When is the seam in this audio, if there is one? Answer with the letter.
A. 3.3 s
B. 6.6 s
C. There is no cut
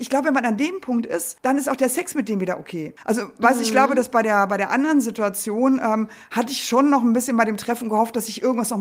C